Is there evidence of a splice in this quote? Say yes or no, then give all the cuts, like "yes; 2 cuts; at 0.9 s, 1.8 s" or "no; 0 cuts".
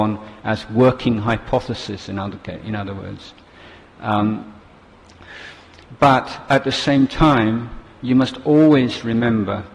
no; 0 cuts